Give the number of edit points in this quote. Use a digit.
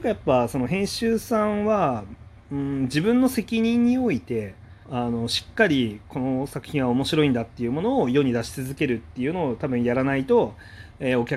1